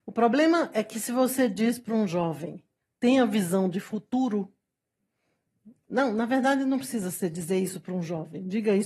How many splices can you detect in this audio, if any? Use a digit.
0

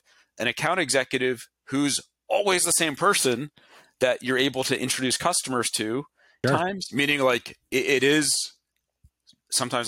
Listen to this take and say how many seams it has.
1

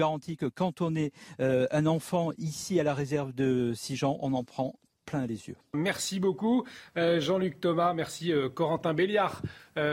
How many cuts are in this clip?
1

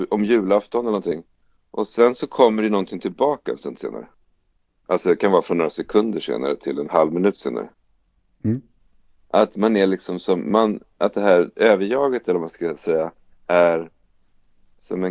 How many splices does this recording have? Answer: 1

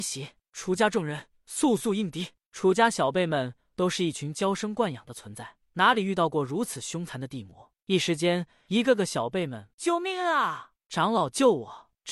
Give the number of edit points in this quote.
1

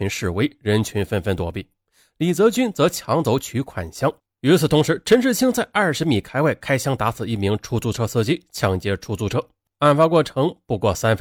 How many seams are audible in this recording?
1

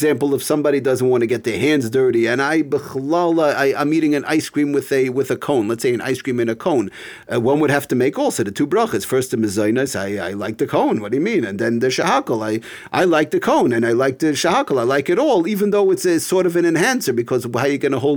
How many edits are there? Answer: 0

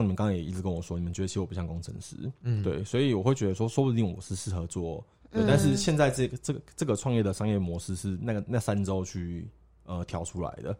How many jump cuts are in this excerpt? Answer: 1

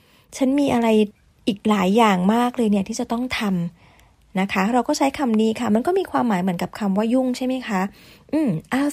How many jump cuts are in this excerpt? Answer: 0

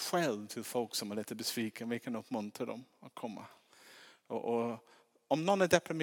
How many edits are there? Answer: 0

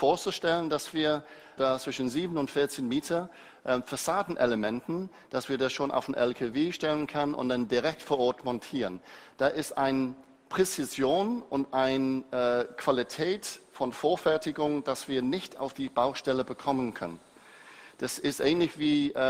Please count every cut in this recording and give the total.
0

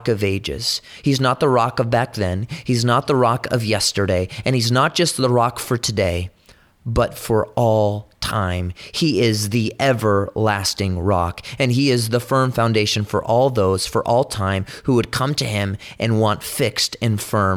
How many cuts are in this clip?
0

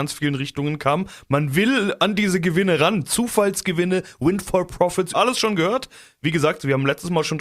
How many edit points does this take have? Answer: 1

